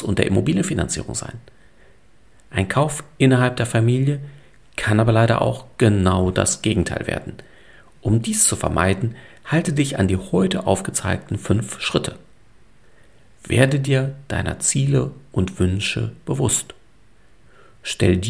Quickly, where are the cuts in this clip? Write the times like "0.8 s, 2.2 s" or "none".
none